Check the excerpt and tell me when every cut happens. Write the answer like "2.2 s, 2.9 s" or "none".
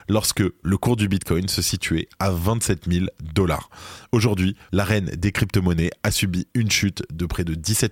4.7 s